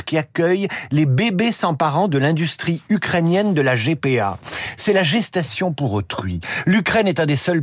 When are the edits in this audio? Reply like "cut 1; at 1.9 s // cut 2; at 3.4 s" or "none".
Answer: none